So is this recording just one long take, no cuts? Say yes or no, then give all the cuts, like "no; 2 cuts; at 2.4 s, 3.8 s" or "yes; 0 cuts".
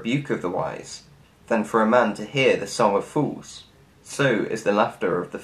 no; 1 cut; at 3.9 s